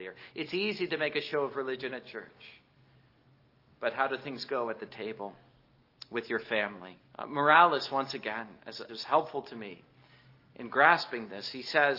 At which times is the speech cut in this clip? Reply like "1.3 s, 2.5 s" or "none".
7.1 s, 8.9 s

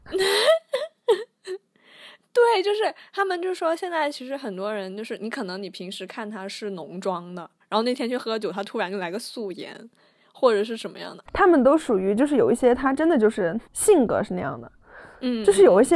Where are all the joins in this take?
11.3 s, 13.6 s

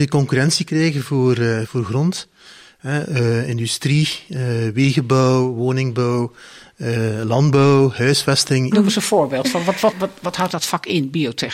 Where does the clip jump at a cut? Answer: 1.7 s, 8.7 s, 9.9 s

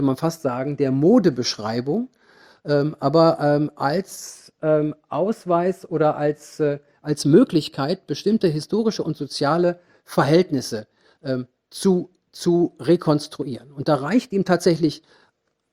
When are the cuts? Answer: none

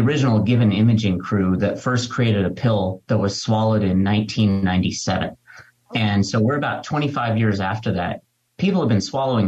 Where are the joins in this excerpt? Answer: none

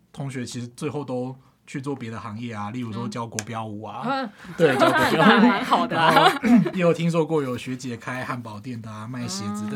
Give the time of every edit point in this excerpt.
none

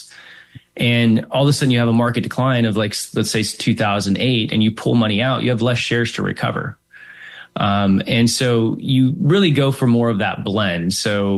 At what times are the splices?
none

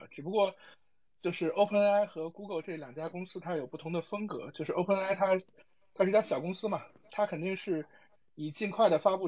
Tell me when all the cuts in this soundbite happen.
none

